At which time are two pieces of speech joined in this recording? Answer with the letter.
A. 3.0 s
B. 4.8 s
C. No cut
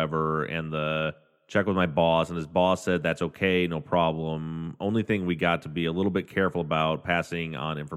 C